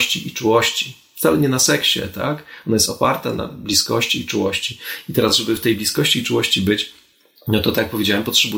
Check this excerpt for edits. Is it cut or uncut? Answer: uncut